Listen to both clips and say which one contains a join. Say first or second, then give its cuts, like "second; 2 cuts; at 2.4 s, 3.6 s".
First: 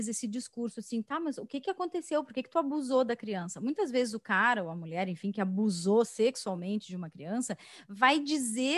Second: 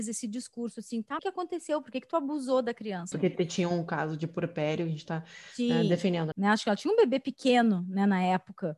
second; 3 cuts; at 1.2 s, 3.1 s, 6.3 s